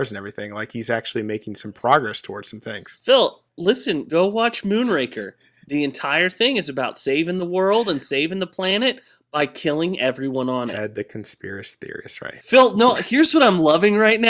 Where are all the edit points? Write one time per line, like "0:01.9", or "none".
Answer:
0:03.5